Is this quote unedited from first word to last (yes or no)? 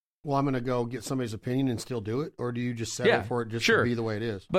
yes